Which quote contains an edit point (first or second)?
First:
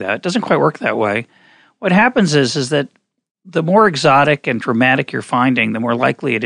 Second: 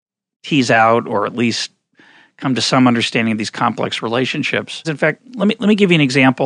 second